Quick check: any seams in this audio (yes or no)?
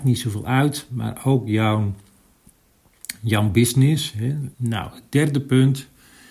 yes